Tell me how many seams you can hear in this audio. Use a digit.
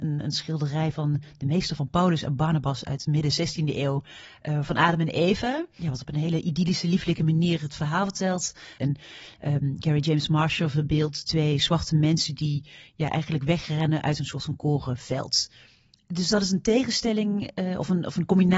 1